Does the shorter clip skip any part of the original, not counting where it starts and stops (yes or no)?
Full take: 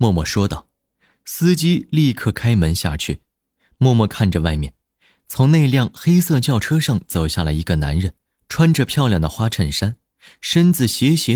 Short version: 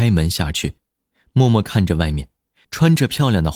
yes